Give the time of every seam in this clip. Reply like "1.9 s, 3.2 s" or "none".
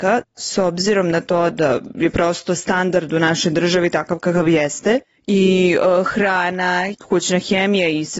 1.5 s